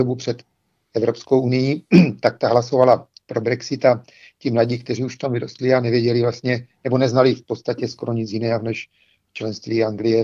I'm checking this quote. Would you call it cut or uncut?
uncut